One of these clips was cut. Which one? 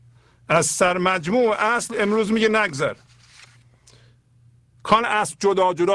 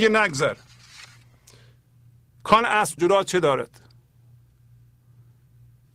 second; 1 cut; at 3.0 s

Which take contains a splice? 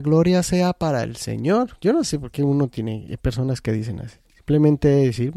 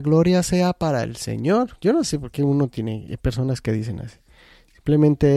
first; 1 cut; at 4.2 s

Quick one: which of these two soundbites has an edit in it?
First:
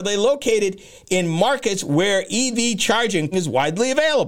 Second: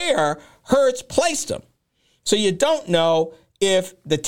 first; 1 cut; at 3.3 s

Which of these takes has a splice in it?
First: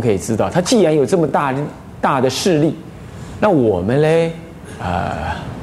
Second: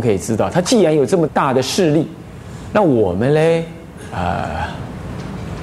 second; 1 cut; at 1.3 s

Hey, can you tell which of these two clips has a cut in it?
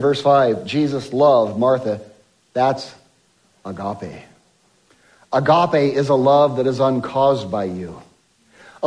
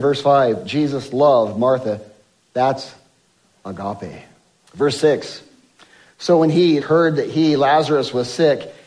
second; 2 cuts; at 4.7 s, 6.8 s

